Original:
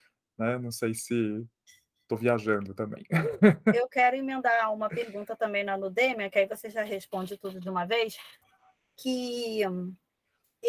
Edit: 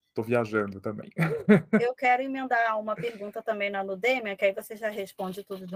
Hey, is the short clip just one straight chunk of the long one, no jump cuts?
yes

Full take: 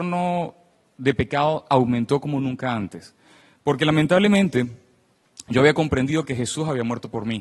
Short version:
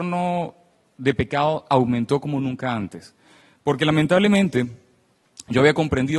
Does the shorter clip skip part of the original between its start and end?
no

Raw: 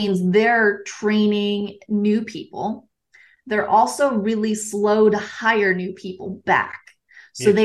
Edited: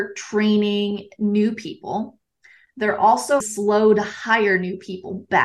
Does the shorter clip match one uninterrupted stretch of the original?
no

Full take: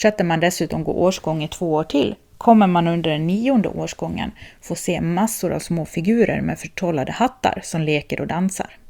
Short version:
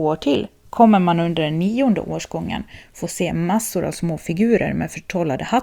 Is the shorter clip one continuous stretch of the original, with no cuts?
yes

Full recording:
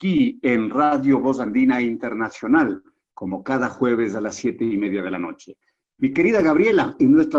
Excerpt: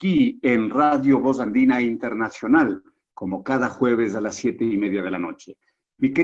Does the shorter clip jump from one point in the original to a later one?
no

